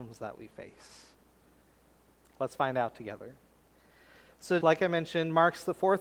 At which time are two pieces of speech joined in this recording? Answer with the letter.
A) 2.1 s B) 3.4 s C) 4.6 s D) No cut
C